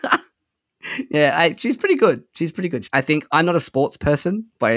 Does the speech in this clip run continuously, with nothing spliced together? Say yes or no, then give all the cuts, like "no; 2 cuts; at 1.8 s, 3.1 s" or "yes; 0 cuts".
no; 1 cut; at 2.9 s